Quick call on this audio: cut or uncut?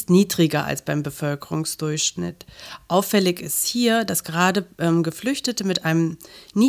uncut